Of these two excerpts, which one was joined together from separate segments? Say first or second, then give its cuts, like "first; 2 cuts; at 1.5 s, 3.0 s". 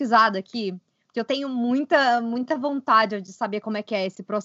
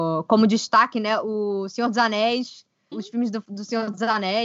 second; 1 cut; at 2.9 s